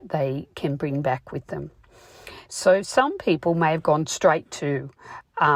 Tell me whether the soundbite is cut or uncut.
cut